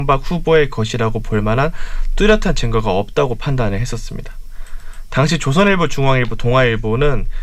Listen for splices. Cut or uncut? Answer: uncut